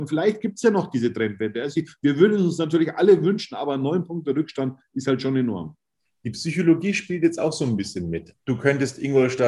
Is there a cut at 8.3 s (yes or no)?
yes